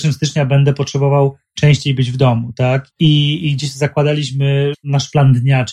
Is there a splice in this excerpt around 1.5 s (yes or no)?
no